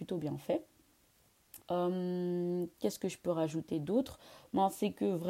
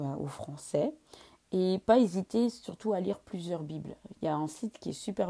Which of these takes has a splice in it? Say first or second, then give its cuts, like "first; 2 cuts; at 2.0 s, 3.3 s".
first; 1 cut; at 1.6 s